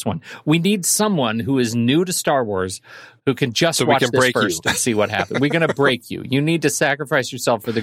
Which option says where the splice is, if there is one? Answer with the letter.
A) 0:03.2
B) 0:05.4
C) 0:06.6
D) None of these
A